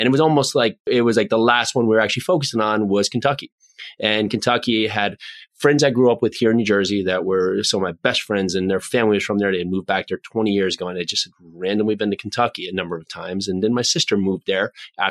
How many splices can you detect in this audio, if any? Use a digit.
0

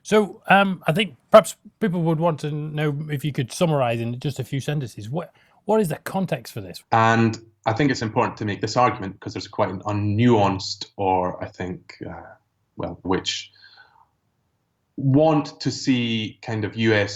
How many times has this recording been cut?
2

